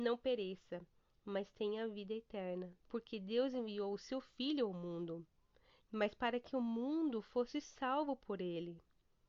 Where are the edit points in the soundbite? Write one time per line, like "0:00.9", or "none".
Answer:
0:02.8
0:05.8